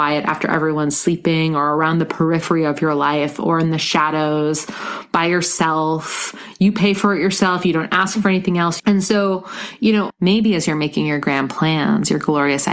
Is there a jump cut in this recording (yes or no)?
yes